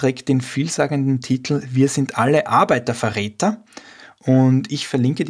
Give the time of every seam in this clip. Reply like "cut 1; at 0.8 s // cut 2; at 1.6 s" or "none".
none